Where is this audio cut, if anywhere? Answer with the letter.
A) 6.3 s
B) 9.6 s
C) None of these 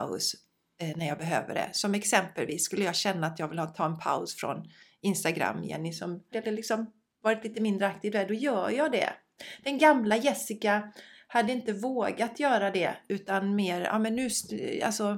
A